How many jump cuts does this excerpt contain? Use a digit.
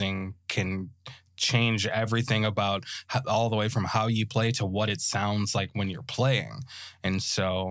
0